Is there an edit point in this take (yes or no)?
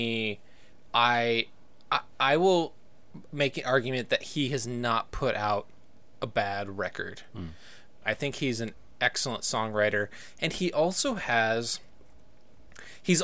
yes